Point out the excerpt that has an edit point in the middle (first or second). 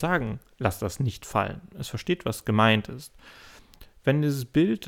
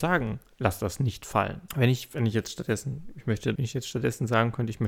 second